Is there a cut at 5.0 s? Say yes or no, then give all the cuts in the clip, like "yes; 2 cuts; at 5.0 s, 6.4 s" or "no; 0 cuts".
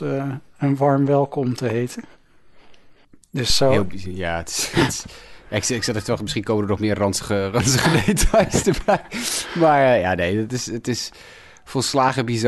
no; 0 cuts